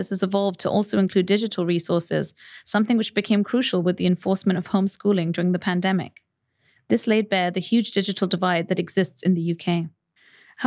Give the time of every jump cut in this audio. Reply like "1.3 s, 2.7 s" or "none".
none